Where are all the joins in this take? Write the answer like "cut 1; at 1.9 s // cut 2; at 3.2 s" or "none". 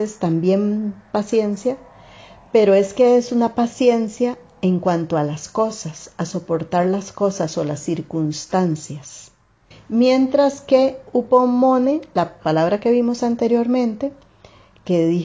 cut 1; at 9.7 s